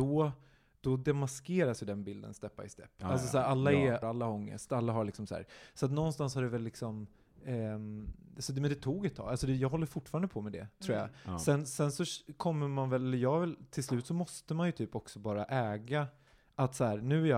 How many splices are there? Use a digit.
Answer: 1